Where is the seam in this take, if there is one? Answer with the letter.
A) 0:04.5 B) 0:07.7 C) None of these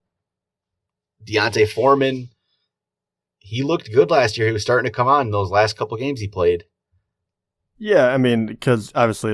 B